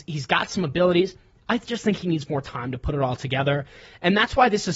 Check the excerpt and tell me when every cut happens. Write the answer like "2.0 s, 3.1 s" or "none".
none